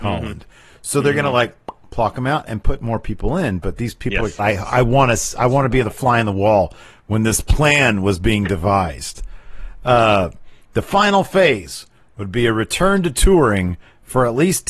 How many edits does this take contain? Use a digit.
1